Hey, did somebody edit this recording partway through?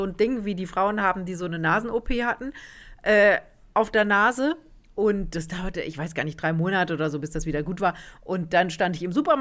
no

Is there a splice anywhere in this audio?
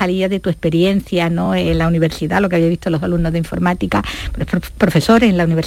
no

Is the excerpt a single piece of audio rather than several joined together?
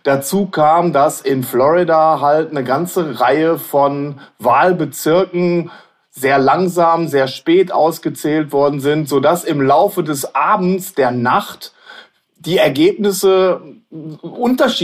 yes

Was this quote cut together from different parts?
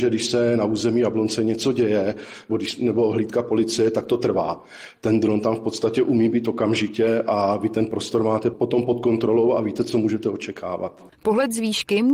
yes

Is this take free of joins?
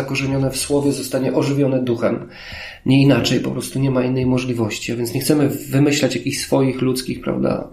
yes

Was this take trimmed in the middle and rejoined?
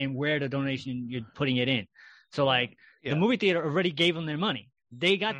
no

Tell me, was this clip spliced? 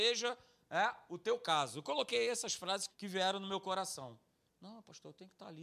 yes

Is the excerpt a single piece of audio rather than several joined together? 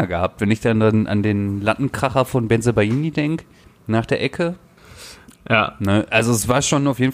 yes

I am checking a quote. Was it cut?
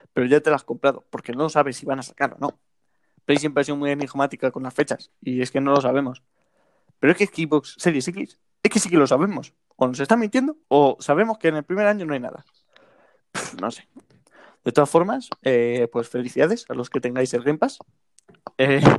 yes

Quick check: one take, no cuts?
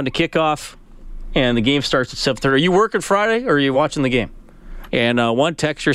no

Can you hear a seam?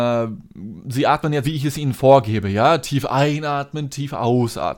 yes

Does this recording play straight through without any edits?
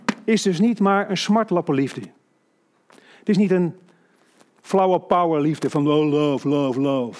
yes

